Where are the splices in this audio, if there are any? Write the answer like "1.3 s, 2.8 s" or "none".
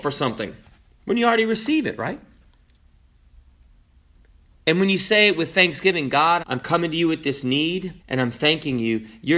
6.4 s, 8.0 s